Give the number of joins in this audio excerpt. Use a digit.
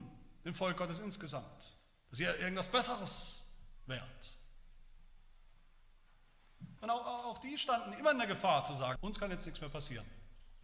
2